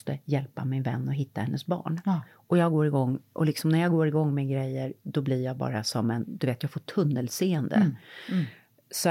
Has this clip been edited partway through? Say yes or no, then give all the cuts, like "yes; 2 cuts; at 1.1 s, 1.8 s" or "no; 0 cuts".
no; 0 cuts